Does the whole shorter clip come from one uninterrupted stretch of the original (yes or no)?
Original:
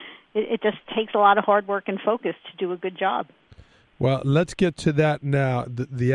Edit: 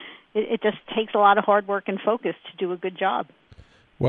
yes